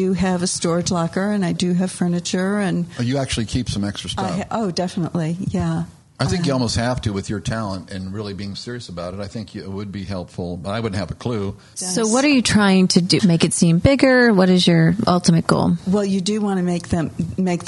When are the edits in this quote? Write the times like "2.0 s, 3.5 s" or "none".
11.7 s, 13.2 s